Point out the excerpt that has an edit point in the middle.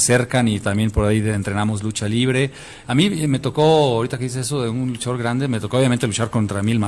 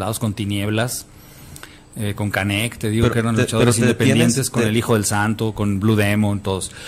first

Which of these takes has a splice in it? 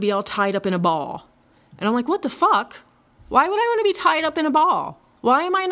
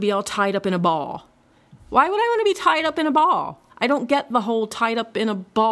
second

